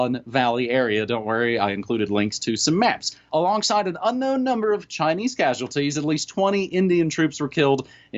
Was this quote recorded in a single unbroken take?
no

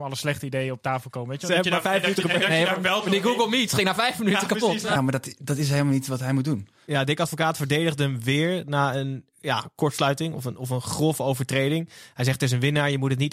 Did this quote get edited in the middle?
yes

